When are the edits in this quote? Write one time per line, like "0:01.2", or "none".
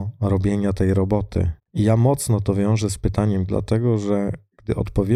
0:01.6
0:03.5